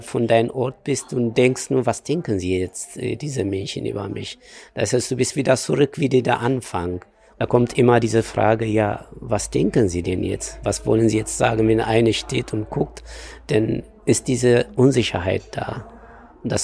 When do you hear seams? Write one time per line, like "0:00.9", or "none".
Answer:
none